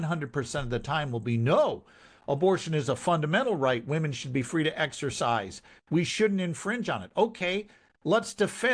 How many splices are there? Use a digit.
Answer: 0